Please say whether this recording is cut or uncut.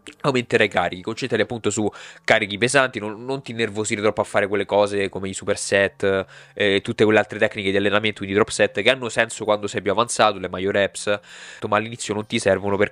cut